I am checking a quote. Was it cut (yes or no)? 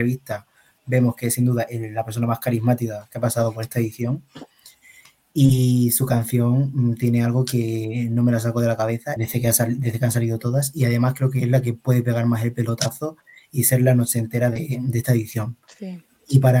yes